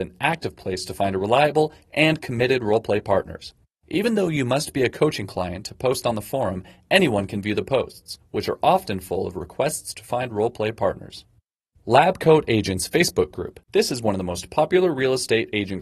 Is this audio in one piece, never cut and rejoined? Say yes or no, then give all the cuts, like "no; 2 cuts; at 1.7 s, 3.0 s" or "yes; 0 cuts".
no; 2 cuts; at 11.8 s, 13.6 s